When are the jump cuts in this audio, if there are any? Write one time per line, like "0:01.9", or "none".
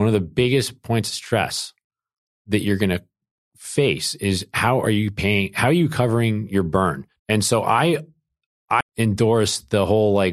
0:07.2
0:08.8